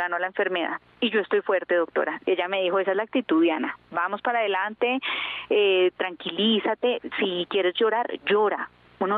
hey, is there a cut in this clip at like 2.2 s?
yes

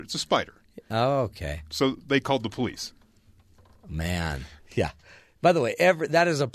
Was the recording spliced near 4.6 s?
yes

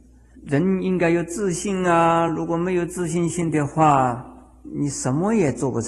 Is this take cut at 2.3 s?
no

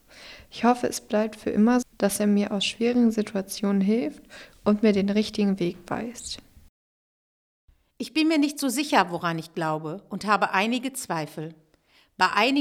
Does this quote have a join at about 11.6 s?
no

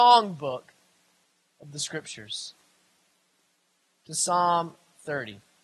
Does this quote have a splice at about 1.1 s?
no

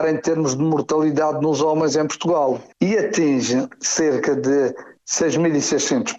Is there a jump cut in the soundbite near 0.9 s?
no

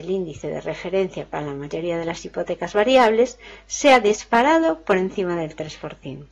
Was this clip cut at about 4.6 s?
no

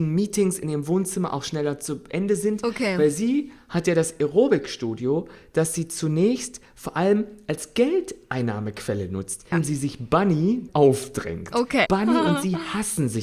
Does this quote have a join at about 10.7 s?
yes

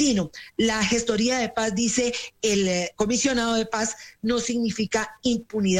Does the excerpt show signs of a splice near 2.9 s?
yes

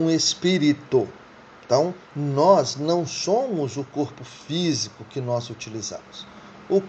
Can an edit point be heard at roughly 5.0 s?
no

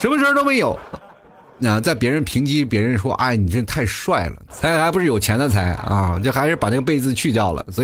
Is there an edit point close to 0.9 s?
yes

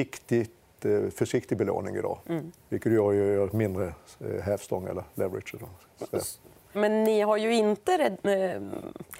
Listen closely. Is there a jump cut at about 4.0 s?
no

